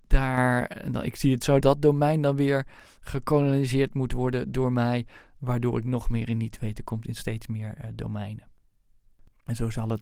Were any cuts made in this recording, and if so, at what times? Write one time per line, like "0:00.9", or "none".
0:01.6

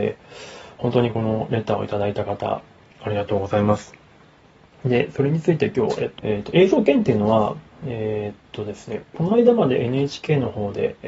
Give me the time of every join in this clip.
0:06.2

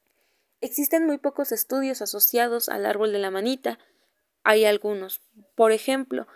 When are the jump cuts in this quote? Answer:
0:04.4

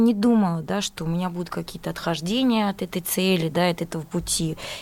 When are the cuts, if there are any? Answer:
none

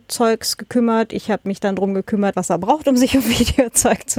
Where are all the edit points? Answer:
0:02.3

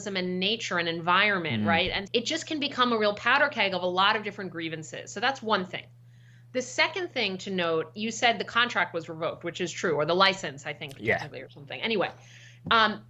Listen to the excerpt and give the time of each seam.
0:02.1

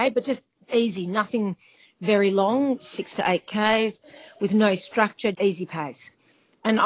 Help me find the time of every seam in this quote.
0:02.8
0:05.3

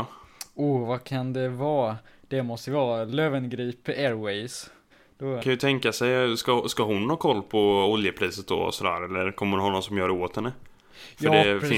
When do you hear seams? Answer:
0:05.4

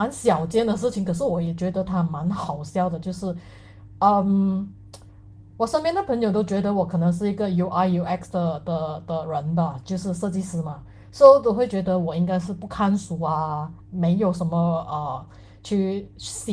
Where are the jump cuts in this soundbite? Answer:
0:13.8

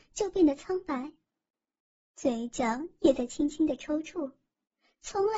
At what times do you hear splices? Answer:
none

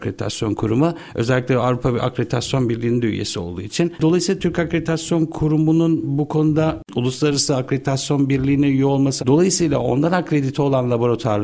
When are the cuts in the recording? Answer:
0:03.9
0:09.2

